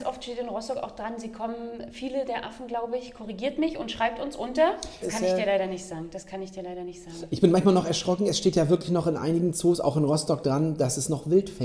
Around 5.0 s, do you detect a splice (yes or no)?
yes